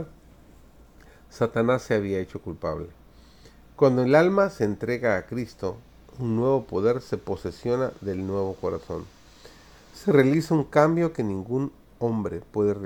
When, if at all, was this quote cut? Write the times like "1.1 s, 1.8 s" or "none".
none

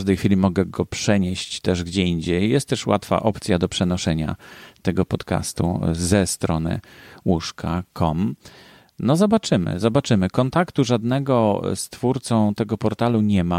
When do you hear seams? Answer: 11.8 s

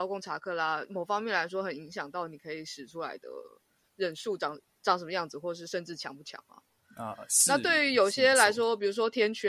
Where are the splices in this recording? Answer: none

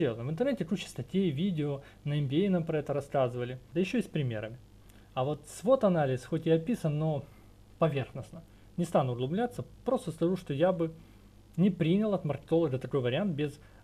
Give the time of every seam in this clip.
3.7 s

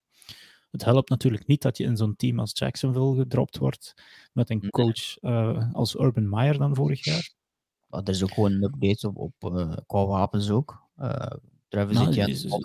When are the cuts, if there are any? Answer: none

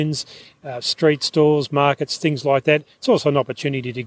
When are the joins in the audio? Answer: none

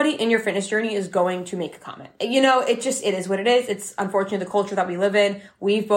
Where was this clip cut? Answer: none

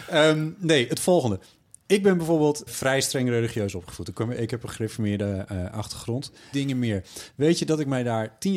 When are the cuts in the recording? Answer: 2.7 s, 6.5 s

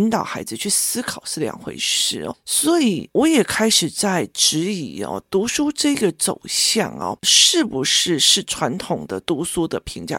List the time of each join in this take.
none

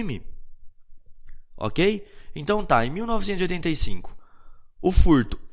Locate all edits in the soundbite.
none

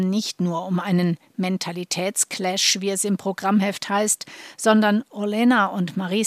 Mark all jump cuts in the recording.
none

